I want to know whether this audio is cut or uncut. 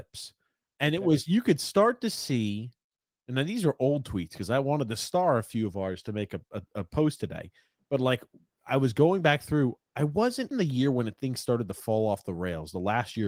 cut